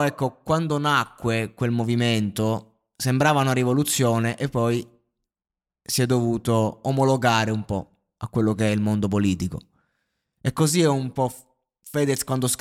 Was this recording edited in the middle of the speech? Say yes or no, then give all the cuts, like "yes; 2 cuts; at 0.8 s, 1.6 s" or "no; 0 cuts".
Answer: no; 0 cuts